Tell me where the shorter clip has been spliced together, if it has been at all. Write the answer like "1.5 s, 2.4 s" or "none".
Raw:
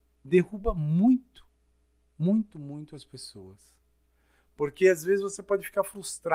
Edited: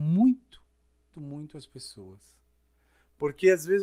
1.1 s